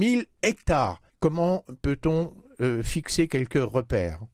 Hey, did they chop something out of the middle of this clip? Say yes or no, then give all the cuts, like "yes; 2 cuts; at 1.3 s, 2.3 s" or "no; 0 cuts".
yes; 1 cut; at 1.1 s